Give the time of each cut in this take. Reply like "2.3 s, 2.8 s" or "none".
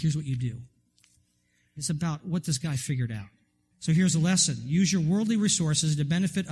1.8 s, 3.7 s